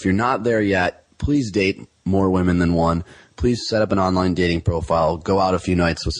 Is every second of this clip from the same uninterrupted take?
yes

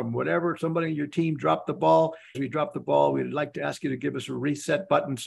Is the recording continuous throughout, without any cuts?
no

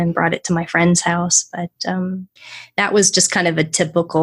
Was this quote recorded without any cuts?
yes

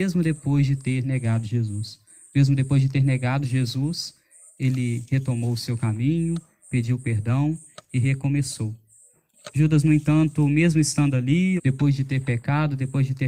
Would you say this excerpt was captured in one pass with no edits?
no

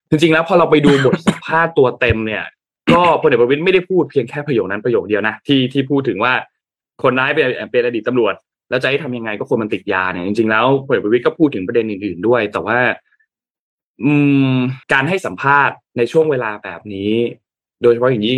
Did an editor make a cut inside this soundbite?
yes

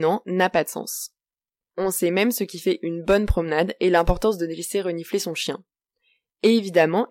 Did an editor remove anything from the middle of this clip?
no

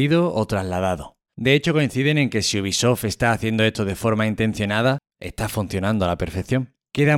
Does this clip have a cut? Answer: yes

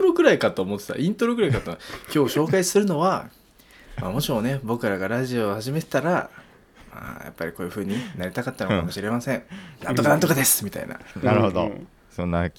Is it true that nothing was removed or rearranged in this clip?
yes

